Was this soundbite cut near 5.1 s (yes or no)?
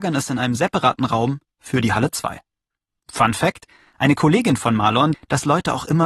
yes